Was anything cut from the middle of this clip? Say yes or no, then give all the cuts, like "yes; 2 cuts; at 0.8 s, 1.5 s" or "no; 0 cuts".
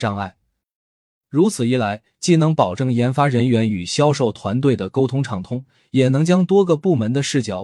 no; 0 cuts